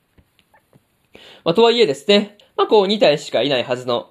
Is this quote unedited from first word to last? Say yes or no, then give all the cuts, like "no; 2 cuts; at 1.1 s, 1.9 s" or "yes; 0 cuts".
no; 1 cut; at 2.4 s